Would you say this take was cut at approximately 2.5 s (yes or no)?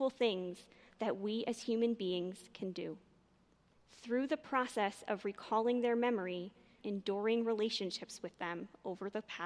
no